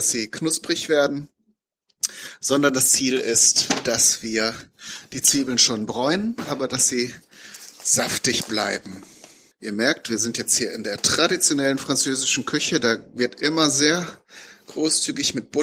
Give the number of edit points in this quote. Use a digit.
1